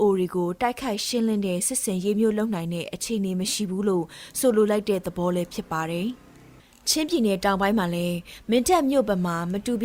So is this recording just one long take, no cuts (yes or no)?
yes